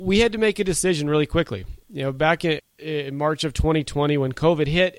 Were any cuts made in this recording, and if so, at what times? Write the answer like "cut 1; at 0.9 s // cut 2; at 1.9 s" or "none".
none